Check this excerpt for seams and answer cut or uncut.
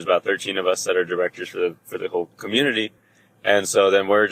uncut